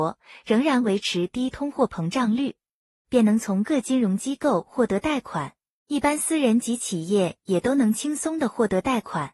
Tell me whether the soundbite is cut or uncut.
cut